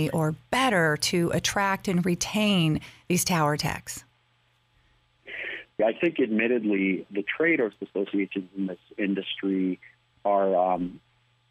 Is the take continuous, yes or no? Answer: no